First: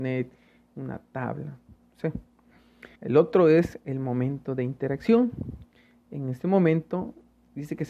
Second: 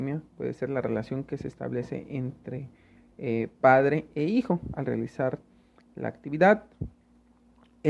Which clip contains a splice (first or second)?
first